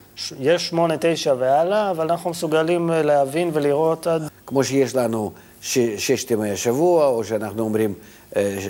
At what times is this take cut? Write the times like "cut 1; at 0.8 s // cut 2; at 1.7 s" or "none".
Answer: cut 1; at 4.3 s